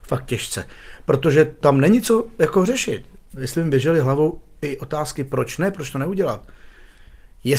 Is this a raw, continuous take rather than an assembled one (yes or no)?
yes